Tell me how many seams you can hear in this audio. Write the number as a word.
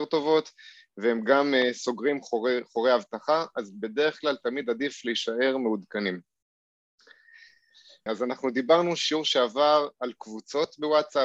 one